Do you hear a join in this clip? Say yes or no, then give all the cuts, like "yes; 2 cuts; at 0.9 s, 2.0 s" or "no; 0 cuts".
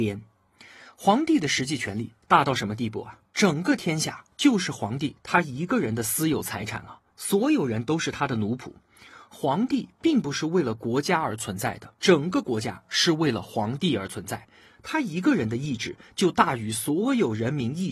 yes; 2 cuts; at 3.3 s, 12.0 s